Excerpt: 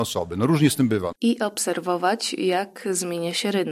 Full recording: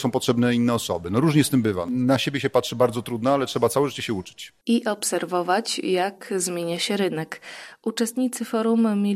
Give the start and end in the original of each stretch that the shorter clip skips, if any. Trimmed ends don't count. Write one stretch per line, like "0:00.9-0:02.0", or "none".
0:01.9-0:04.6